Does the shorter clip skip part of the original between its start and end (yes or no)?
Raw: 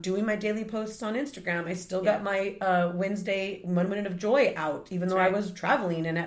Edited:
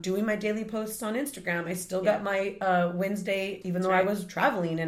yes